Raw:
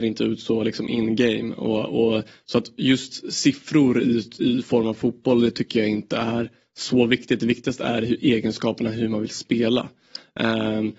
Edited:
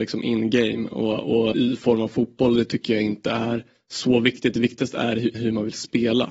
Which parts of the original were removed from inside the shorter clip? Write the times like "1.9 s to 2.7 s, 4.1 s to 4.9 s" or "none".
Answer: 2.2 s to 4.4 s, 8.2 s to 8.9 s